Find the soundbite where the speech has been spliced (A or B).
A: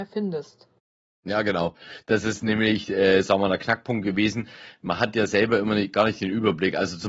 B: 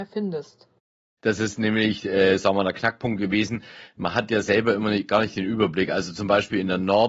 B